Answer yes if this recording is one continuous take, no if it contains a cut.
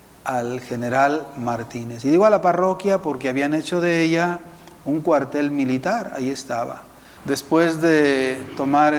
no